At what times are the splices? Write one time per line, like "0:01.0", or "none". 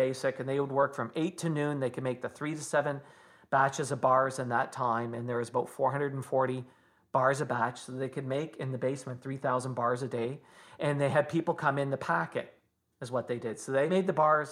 none